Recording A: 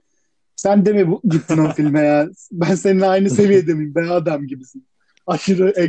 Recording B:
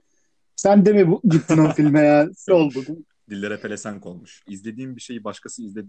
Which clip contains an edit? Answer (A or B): B